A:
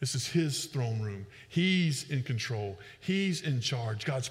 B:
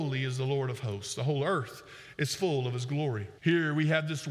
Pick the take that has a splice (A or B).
B